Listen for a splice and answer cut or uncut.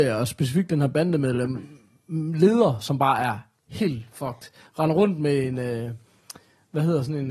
uncut